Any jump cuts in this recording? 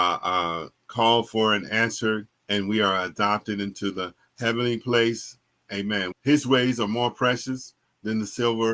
yes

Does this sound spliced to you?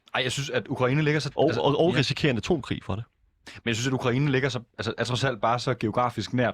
no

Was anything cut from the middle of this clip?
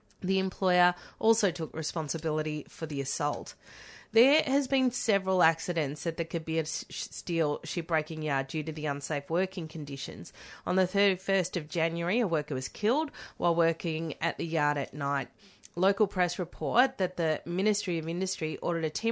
no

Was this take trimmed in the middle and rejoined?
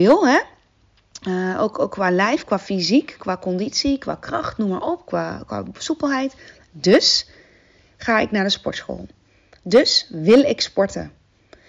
no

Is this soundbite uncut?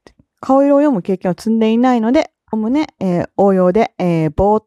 no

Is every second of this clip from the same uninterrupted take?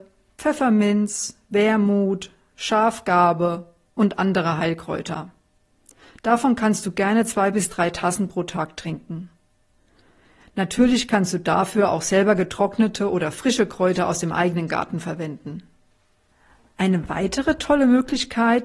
yes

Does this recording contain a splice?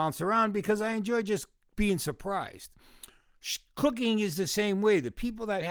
no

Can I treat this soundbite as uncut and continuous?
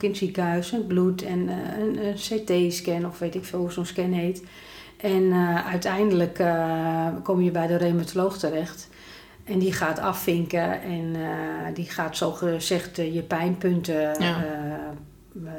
yes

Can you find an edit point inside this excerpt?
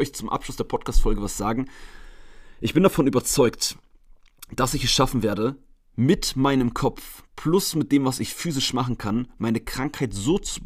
no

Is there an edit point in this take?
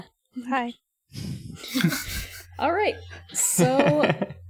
no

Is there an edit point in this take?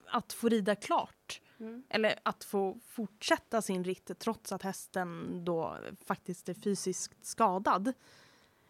yes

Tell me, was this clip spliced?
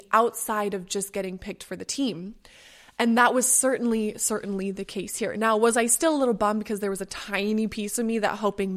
no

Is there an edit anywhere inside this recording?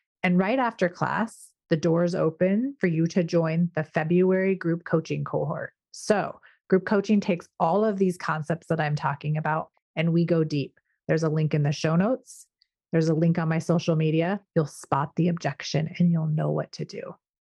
yes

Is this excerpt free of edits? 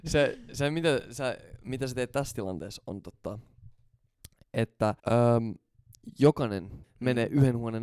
no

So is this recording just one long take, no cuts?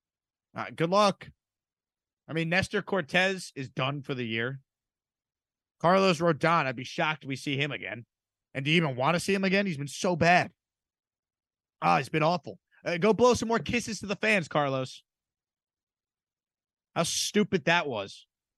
yes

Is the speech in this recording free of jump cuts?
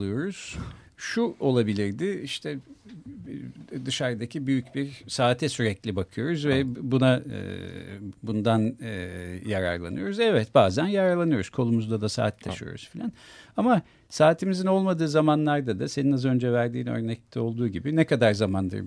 no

